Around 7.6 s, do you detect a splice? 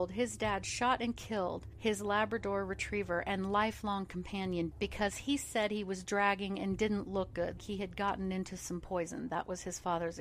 yes; 2 cuts; at 4.7 s, 7.6 s

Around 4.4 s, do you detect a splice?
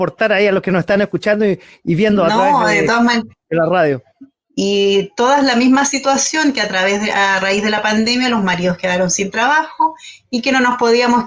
yes; 1 cut; at 4.4 s

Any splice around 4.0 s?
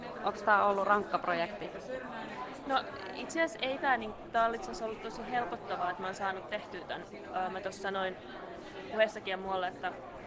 no; 0 cuts

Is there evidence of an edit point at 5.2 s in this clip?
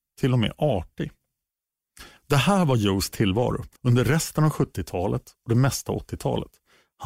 no; 2 cuts; at 2.2 s, 3.8 s

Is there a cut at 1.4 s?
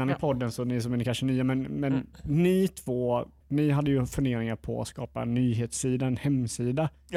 no; 1 cut; at 3.4 s

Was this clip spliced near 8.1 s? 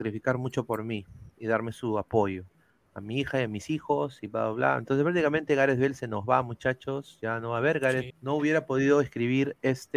yes; 1 cut; at 8.1 s

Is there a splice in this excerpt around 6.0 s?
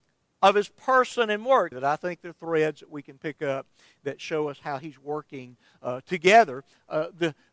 no; 1 cut; at 1.7 s

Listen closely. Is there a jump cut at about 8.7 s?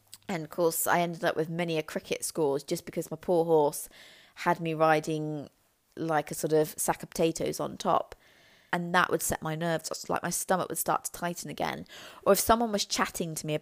yes; 1 cut; at 8.7 s

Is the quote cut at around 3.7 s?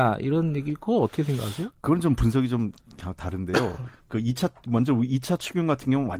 no; 0 cuts

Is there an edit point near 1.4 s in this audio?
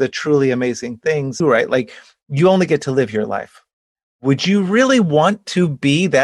yes; 1 cut; at 1.4 s

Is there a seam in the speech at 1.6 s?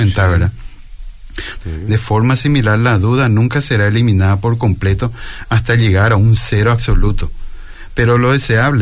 yes; 1 cut; at 1.6 s

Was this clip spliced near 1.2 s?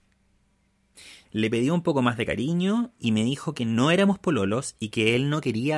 yes; 1 cut; at 1.2 s

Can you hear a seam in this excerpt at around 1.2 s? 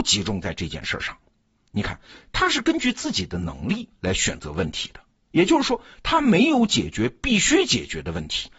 no; 0 cuts

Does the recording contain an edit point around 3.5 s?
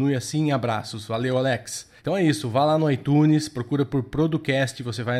no; 1 cut; at 2.0 s

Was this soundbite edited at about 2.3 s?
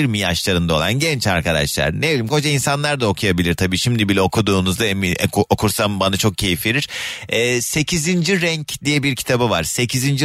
yes; 1 cut; at 2.3 s

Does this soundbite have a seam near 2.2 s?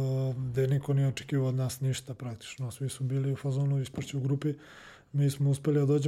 no; 0 cuts

